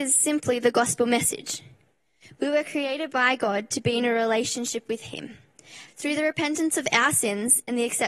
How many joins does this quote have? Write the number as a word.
one